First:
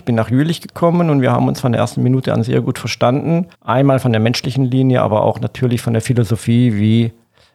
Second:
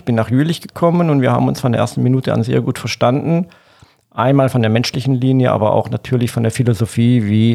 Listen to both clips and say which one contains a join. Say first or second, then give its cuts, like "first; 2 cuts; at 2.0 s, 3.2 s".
first; 1 cut; at 3.5 s